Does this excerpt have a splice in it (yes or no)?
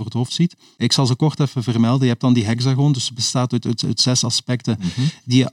no